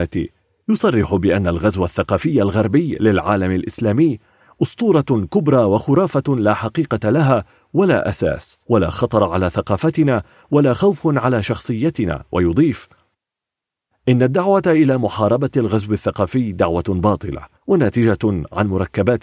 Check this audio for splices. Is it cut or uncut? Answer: cut